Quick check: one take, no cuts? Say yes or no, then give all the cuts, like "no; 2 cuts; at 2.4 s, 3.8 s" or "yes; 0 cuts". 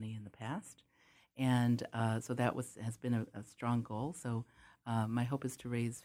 yes; 0 cuts